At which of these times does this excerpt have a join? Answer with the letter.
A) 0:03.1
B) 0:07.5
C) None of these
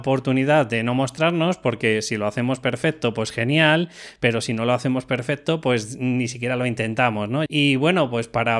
B